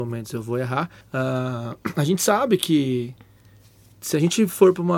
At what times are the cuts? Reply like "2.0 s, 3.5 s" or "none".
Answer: 1.0 s